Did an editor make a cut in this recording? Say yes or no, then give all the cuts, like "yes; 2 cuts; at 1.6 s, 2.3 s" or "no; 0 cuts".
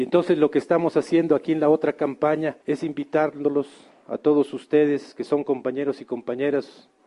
yes; 1 cut; at 2.6 s